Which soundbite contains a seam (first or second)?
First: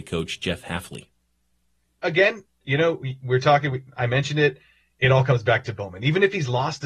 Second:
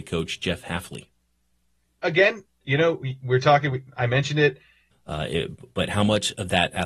second